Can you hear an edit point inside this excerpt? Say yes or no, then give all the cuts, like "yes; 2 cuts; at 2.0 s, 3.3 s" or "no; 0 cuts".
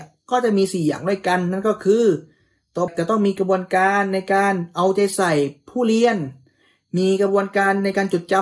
yes; 1 cut; at 2.9 s